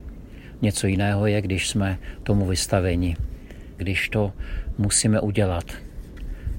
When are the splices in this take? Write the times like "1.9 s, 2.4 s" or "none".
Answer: 3.8 s